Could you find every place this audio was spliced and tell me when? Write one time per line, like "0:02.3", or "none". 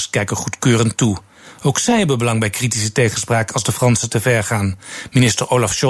none